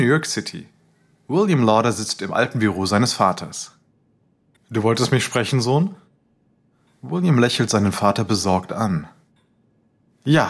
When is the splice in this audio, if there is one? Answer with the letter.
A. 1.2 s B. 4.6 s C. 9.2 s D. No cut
B